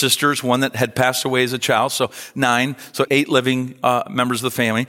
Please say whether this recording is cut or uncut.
cut